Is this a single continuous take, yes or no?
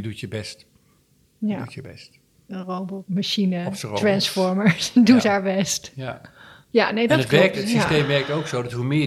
yes